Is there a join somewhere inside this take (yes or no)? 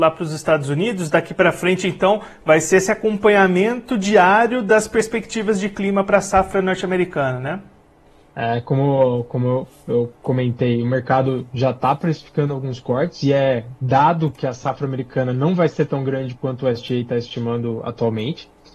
yes